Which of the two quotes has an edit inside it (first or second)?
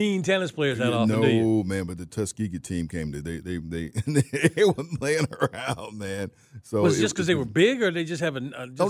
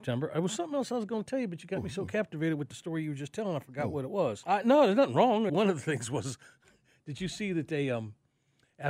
second